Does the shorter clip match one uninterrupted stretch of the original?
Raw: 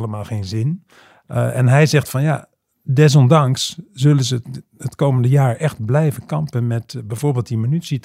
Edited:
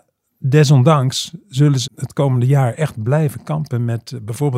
no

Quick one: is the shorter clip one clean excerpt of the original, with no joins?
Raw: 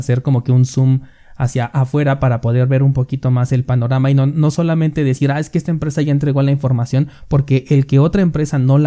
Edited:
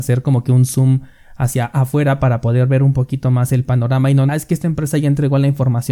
no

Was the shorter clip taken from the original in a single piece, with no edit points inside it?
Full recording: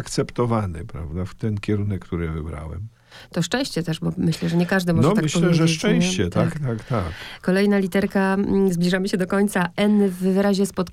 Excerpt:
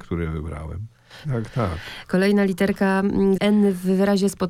no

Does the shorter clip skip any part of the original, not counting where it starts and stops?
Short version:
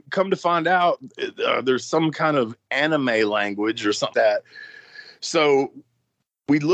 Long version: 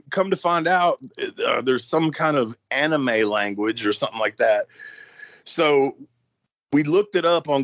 yes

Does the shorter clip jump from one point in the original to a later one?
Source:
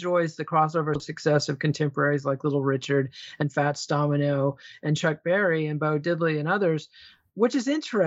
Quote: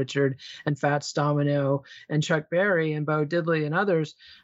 no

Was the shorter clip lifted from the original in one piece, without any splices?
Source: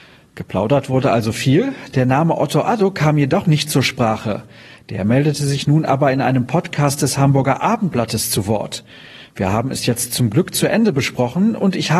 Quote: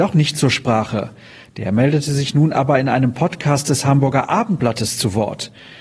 yes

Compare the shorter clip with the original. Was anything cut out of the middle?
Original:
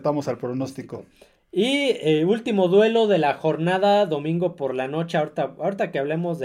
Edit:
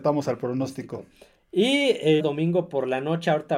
yes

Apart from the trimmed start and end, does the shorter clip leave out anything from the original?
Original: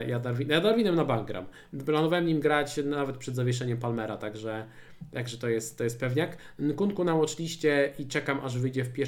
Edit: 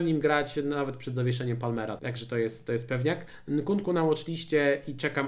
yes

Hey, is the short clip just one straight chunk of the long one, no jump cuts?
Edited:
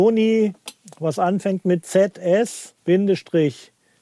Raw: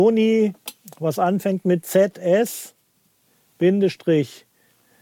no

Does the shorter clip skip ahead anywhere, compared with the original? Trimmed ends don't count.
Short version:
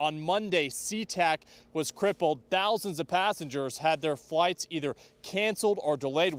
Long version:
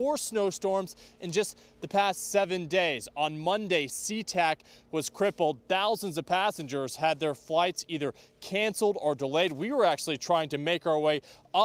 no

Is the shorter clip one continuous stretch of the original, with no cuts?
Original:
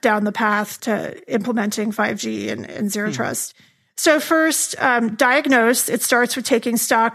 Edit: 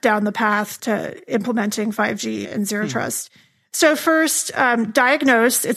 no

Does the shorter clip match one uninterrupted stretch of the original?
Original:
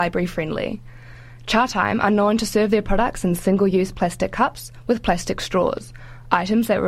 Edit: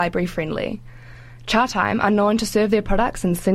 yes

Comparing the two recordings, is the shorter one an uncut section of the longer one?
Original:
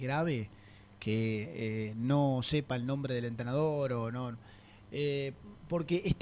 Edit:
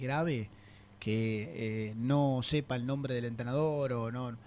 yes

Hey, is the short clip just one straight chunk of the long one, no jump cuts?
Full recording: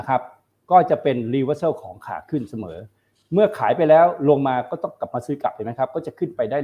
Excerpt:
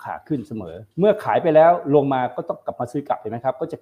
no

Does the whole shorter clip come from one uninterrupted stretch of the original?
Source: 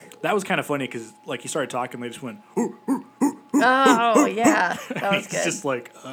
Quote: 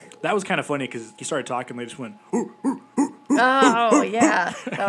no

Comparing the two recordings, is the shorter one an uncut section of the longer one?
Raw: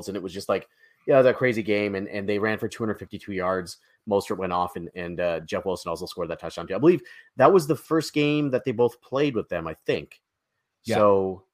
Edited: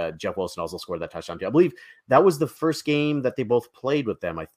yes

